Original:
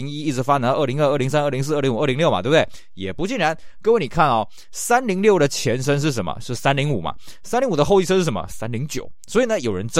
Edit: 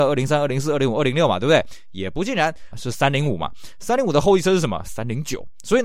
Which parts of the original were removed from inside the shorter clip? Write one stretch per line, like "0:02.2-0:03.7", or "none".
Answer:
0:03.7-0:06.4